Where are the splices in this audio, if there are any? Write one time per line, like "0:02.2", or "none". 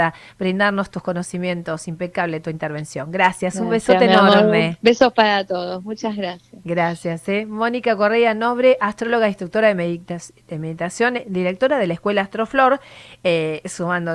none